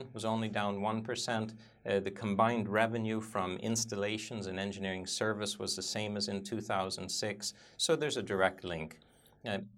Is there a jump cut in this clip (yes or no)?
no